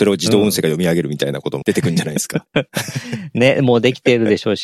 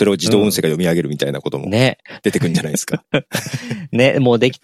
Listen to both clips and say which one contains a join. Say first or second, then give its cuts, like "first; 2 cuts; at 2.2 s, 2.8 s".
first; 1 cut; at 1.6 s